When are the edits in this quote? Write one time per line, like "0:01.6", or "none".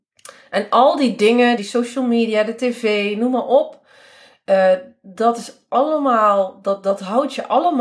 0:01.6